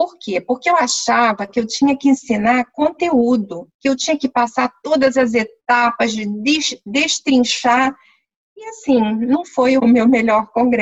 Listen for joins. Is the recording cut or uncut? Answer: cut